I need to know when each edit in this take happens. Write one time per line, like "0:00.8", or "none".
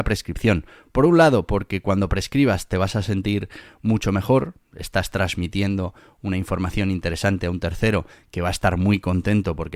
none